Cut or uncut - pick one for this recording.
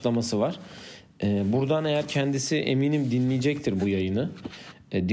uncut